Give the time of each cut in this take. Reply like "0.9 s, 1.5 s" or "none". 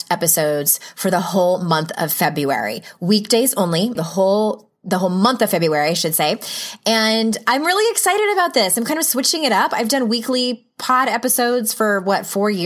4.0 s

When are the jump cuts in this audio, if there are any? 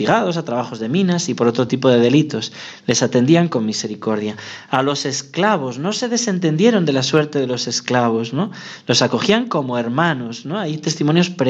none

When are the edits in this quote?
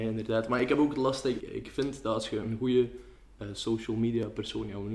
1.4 s

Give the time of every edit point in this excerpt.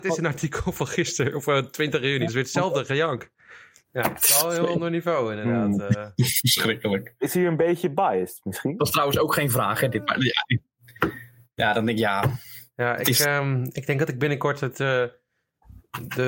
2.3 s, 3.8 s

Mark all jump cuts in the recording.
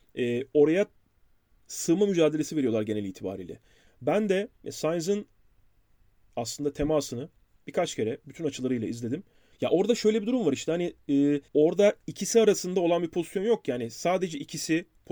3.9 s, 9.5 s, 11.5 s

